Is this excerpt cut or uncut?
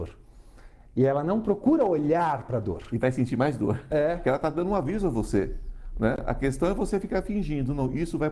cut